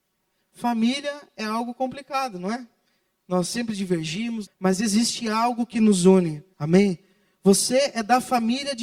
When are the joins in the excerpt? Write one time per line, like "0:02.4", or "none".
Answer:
0:04.5
0:06.5